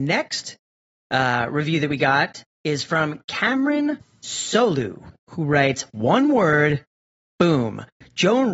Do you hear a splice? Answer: no; 0 cuts

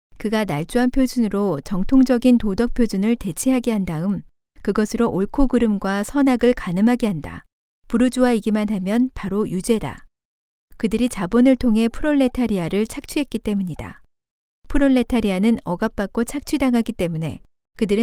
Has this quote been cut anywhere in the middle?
yes; 1 cut; at 7.7 s

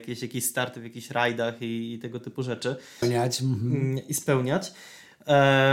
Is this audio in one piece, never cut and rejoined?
no; 1 cut; at 3.0 s

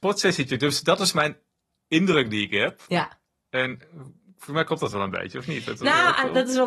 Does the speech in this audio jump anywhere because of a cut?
no; 0 cuts

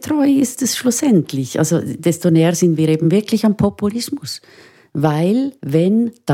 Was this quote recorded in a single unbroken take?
yes; 0 cuts

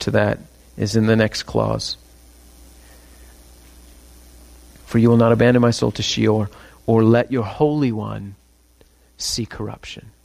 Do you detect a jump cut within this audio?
no; 0 cuts

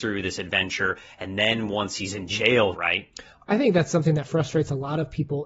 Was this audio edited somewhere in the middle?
yes; 1 cut; at 2.7 s

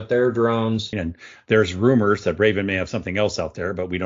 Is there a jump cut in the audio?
yes; 1 cut; at 0.9 s

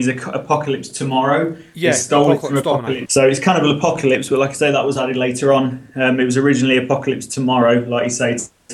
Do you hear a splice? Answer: yes; 1 cut; at 3.1 s

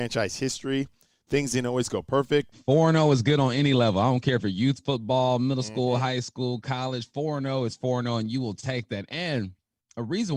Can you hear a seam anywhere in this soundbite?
yes; 1 cut; at 2.5 s

